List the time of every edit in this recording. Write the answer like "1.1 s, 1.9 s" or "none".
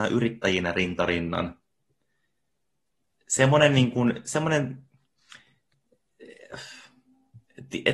none